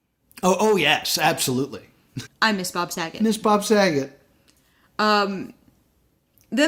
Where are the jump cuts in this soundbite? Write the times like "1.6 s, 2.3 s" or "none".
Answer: 2.3 s